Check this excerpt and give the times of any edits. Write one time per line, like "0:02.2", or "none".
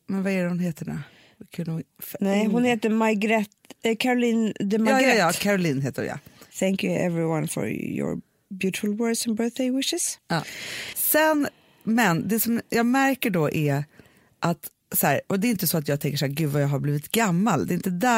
0:06.5
0:10.9